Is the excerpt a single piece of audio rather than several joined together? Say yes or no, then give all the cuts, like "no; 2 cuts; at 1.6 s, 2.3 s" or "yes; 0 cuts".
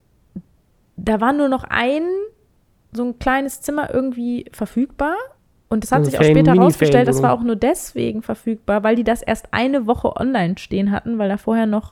yes; 0 cuts